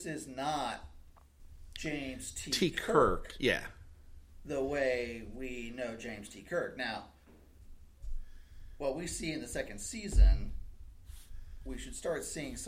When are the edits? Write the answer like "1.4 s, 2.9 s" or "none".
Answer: none